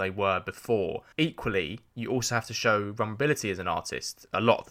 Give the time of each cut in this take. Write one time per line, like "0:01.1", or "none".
0:01.1